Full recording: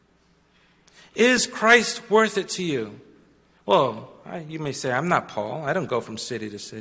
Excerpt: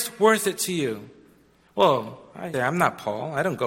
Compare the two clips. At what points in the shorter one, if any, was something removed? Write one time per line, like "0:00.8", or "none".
0:02.5